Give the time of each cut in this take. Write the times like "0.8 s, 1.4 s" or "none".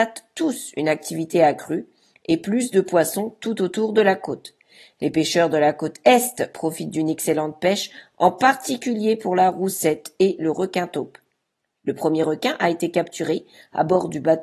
none

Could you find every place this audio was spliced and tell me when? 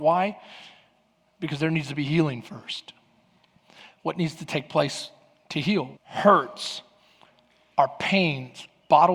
6.0 s

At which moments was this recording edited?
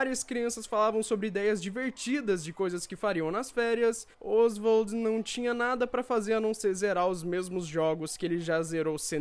4.1 s

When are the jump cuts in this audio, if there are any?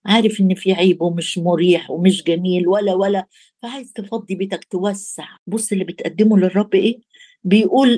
5.4 s

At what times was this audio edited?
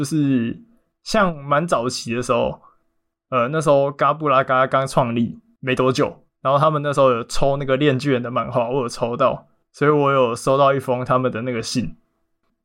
none

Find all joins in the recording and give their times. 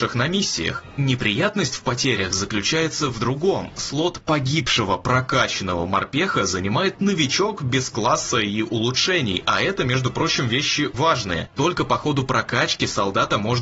10.9 s

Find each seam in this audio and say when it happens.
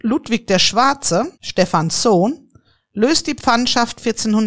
1.3 s

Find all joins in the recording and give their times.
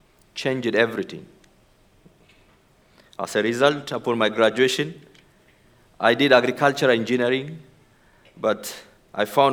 none

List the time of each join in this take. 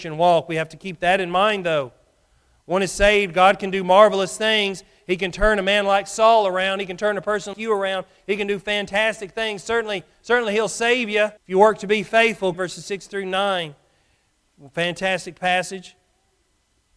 7.5 s, 11.4 s, 12.5 s

